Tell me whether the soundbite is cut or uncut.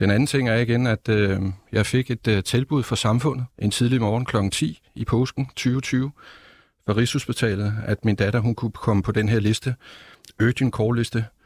cut